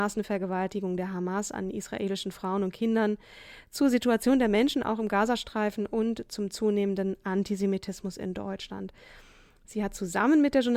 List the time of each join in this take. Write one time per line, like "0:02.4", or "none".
none